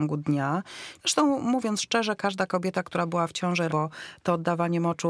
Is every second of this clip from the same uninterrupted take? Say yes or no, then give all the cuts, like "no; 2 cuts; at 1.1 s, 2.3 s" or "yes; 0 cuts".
no; 2 cuts; at 1.0 s, 3.7 s